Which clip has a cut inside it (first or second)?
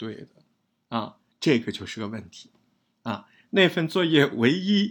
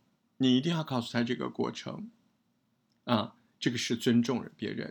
first